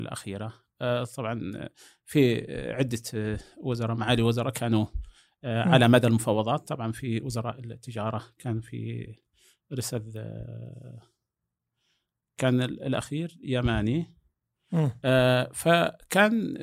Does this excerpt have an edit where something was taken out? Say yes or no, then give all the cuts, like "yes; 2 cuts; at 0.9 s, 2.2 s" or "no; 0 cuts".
no; 0 cuts